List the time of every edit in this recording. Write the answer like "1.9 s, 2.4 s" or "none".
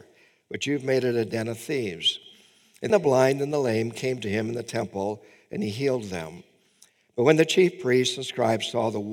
2.9 s